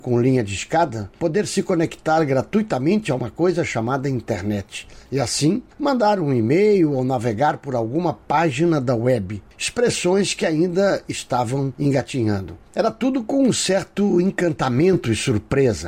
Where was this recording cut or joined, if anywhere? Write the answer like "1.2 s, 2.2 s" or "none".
none